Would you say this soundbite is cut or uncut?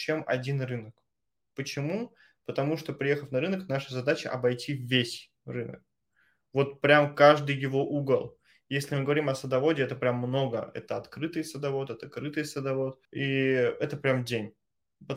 uncut